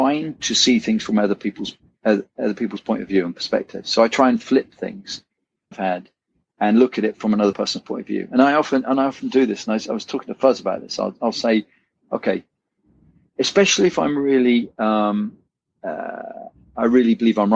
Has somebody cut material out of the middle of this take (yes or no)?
yes